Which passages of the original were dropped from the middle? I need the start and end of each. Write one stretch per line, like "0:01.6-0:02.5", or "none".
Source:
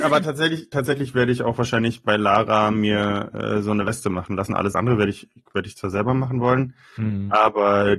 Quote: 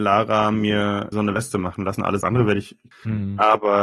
0:03.3-0:03.6
0:05.4-0:06.8

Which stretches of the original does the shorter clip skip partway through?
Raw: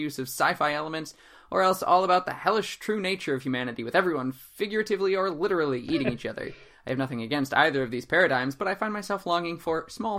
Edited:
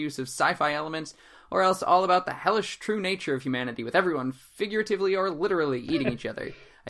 none

